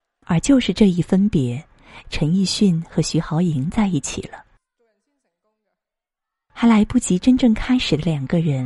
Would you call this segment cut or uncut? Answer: cut